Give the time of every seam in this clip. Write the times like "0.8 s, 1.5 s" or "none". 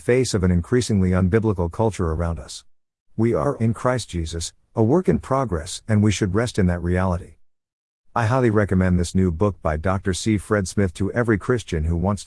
3.6 s